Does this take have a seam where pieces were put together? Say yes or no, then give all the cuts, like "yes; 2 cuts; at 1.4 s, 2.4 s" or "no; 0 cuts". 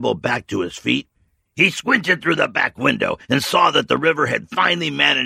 no; 0 cuts